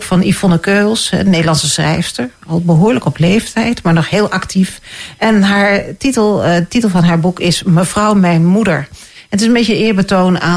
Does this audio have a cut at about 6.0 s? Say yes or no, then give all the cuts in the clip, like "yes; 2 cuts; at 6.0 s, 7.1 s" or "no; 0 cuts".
no; 0 cuts